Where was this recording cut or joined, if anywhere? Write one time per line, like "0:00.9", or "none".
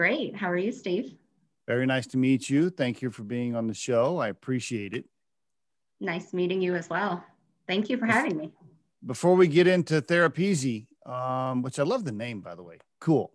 none